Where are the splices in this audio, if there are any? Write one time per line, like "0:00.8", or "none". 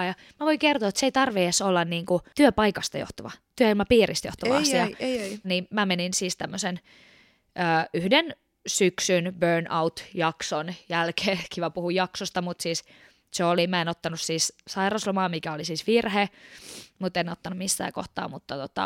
0:05.4